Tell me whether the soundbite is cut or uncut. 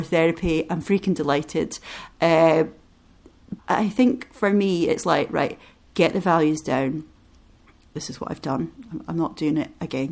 cut